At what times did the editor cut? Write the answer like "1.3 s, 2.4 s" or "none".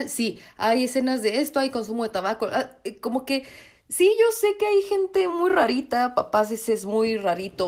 none